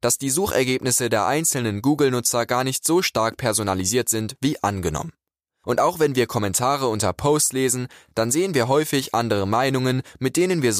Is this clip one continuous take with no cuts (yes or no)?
yes